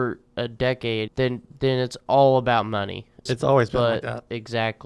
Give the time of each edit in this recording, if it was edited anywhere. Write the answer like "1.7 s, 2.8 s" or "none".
1.1 s, 3.3 s